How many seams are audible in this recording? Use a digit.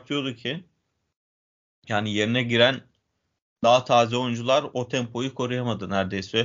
0